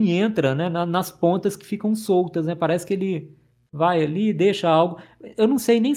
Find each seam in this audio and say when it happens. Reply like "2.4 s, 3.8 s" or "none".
none